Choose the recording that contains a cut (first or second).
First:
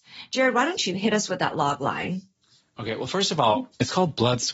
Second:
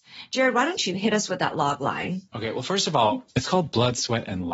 second